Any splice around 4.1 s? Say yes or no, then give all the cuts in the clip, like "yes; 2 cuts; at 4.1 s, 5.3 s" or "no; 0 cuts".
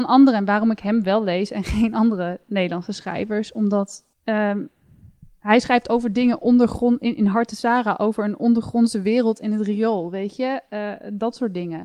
yes; 1 cut; at 4.1 s